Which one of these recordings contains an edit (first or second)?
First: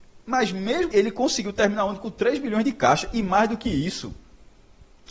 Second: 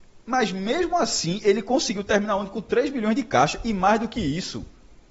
first